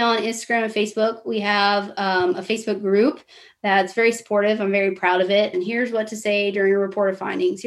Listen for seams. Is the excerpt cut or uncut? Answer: cut